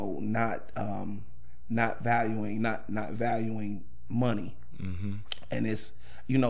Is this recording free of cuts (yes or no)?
yes